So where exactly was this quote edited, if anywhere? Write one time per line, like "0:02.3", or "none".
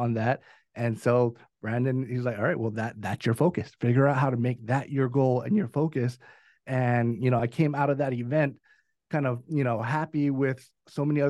none

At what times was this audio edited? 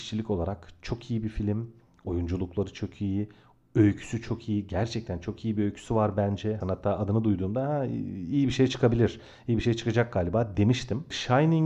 0:06.6

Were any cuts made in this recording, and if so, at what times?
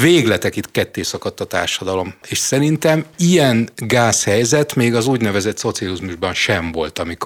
0:02.2

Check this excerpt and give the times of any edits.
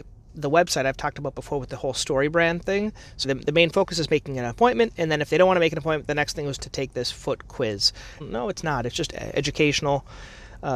0:03.2
0:08.2

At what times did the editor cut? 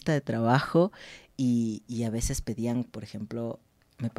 0:01.9

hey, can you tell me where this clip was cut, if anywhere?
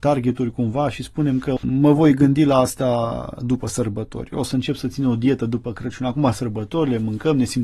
none

